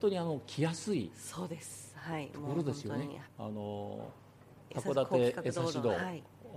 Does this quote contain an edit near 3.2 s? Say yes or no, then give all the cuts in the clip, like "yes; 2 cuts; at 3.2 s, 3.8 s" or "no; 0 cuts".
yes; 1 cut; at 3.2 s